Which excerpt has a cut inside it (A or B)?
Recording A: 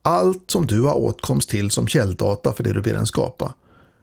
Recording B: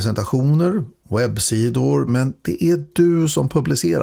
B